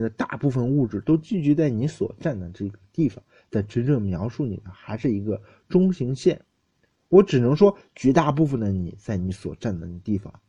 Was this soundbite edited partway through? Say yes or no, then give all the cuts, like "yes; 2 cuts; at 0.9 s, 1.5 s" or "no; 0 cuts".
no; 0 cuts